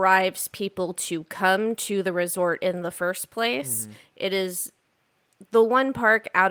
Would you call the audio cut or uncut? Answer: uncut